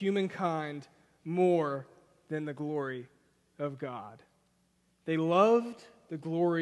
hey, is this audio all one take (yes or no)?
yes